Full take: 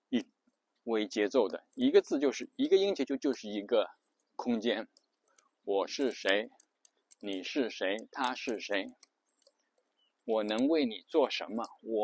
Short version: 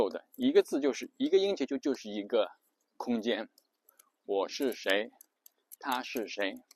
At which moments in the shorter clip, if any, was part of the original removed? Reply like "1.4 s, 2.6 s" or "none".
5.8 s